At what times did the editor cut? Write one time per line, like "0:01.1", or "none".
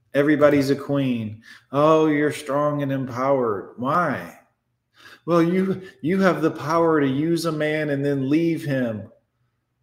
none